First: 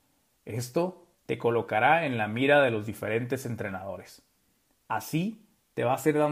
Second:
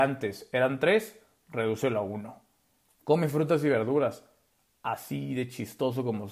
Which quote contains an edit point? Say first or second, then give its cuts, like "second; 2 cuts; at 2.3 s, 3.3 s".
first; 2 cuts; at 1.1 s, 4.8 s